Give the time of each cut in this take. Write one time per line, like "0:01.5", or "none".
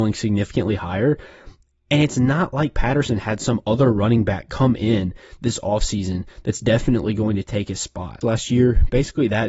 0:08.2